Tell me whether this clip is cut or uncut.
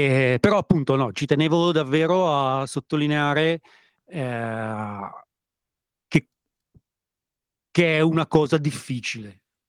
uncut